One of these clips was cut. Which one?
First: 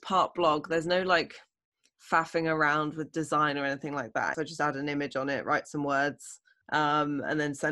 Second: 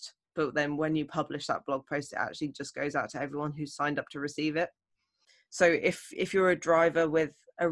first; 2 cuts; at 4.3 s, 6.6 s

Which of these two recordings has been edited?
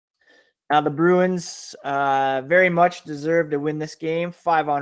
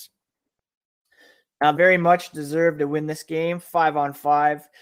second; 1 cut; at 1.7 s

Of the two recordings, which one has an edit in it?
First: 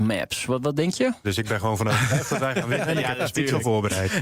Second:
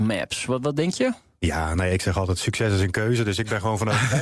first; 1 cut; at 1.2 s

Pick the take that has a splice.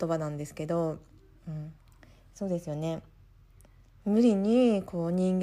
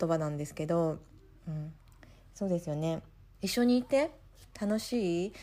second; 1 cut; at 3.3 s

